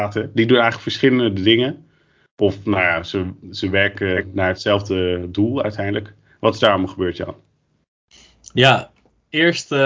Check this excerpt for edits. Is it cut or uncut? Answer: uncut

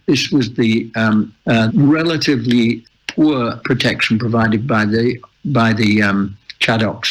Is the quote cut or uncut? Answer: cut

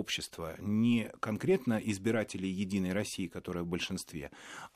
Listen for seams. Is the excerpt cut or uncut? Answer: uncut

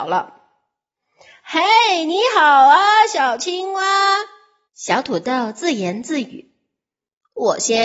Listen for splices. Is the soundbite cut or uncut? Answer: cut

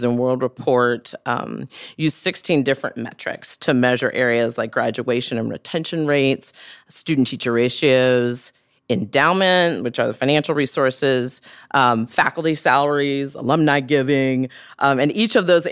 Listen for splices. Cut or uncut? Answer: uncut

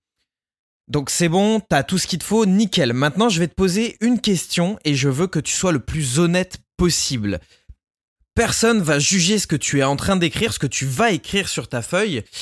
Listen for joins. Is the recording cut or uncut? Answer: uncut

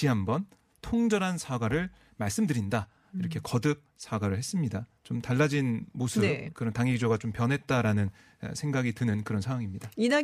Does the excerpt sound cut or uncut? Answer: cut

